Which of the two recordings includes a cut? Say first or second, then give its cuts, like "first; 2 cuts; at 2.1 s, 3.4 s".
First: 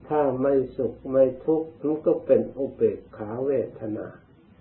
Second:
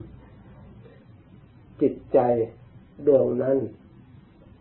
first; 1 cut; at 1.8 s